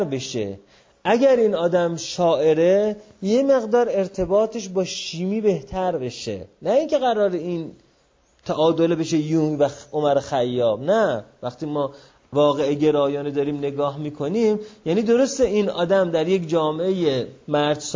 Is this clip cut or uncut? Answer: uncut